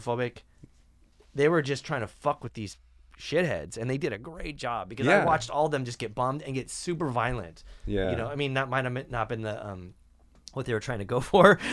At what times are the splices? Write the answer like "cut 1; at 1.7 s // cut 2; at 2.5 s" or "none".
none